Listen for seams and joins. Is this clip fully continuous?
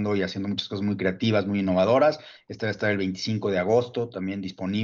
yes; 0 cuts

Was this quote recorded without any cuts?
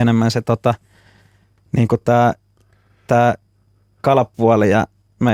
yes; 0 cuts

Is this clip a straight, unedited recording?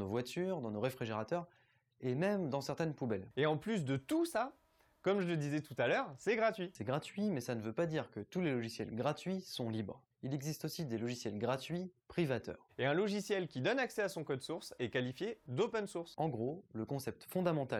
no; 1 cut; at 12.7 s

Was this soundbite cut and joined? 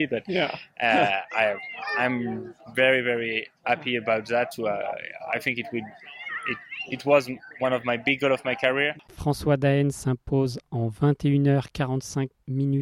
no; 0 cuts

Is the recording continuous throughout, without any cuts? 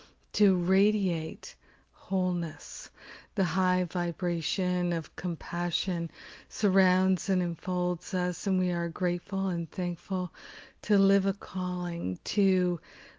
yes; 0 cuts

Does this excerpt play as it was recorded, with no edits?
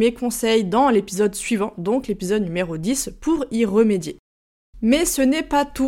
yes; 0 cuts

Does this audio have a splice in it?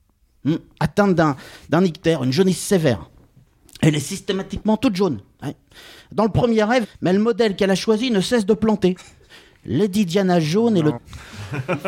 yes; 2 cuts; at 6.8 s, 11.0 s

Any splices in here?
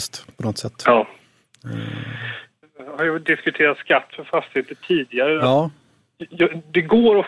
no; 0 cuts

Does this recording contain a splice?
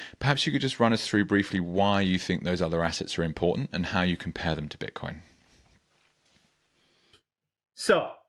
no; 0 cuts

